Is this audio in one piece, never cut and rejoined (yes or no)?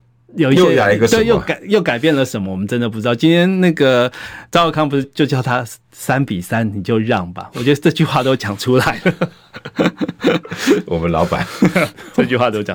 no